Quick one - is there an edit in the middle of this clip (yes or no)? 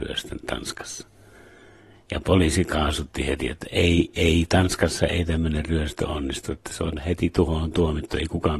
no